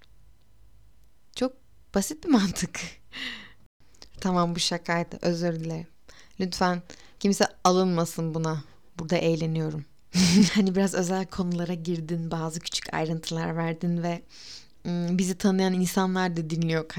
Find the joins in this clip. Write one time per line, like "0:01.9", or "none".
0:04.1
0:10.5